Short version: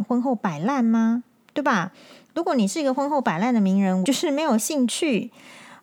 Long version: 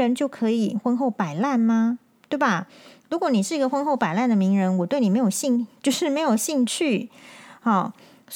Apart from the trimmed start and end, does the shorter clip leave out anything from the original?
yes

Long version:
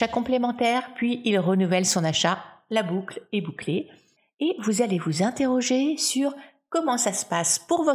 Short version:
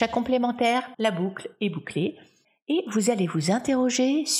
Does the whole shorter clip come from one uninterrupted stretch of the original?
no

